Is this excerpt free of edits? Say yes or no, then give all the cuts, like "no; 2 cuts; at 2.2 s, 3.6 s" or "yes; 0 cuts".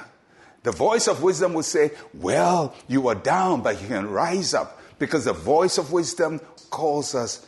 no; 1 cut; at 6.6 s